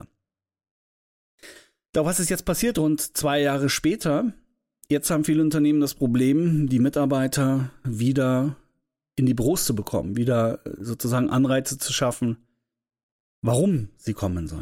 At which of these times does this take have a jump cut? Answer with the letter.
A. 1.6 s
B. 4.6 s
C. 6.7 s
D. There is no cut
D